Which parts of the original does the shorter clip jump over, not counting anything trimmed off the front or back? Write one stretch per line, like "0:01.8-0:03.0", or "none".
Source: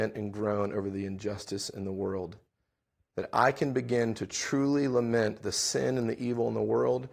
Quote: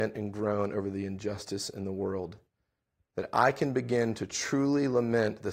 none